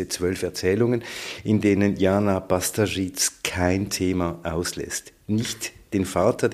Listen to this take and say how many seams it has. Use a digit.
0